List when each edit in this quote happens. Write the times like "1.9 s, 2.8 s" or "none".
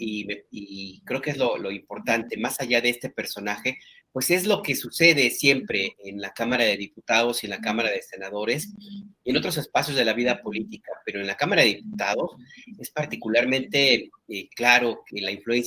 none